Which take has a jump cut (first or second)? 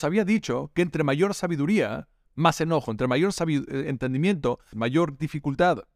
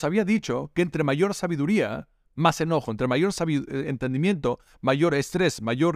first